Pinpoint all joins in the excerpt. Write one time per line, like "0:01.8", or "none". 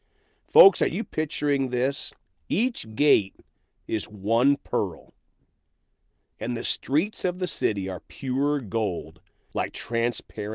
none